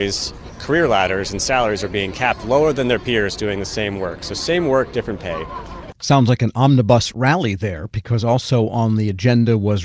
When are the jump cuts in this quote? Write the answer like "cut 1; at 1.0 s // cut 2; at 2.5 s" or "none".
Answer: cut 1; at 5.9 s